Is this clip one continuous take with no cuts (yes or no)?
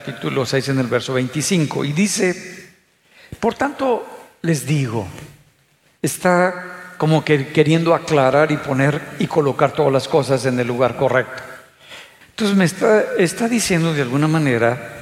no